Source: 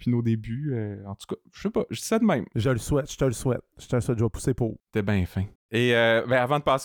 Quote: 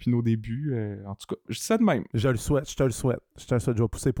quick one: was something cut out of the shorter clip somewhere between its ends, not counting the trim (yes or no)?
yes